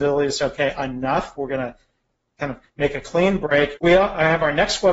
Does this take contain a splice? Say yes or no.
yes